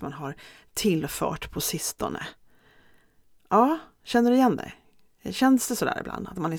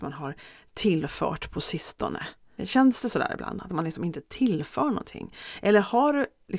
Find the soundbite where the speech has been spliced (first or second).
second